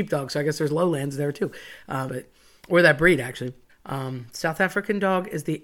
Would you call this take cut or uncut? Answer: cut